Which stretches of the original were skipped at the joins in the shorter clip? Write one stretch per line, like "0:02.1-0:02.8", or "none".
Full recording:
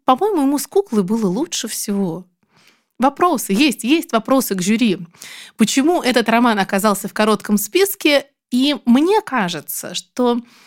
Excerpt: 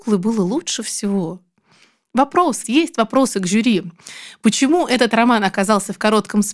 0:03.5-0:03.8